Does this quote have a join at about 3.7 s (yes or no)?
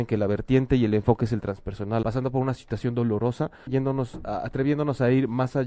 yes